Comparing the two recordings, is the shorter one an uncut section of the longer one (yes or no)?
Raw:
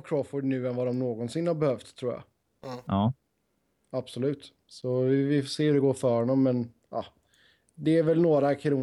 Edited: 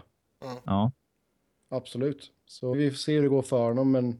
no